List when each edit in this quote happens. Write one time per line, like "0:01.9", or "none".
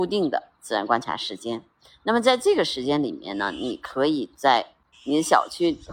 0:04.9